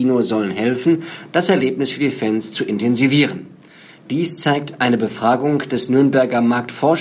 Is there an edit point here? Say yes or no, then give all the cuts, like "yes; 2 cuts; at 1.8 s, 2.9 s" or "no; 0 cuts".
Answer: yes; 1 cut; at 4.0 s